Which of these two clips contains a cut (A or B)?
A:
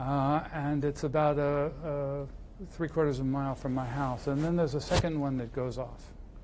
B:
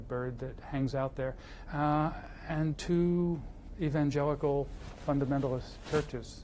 B